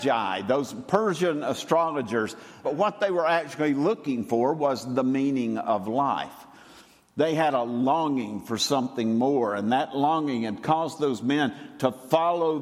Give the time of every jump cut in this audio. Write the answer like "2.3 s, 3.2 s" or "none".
2.6 s